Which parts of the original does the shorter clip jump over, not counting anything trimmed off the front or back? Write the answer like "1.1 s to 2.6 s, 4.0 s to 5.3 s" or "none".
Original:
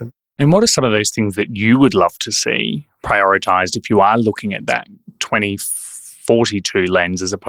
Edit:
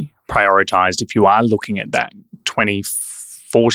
none